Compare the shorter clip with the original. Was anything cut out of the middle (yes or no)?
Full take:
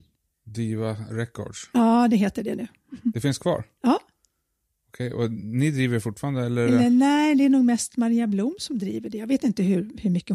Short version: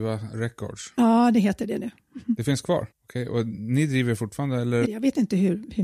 yes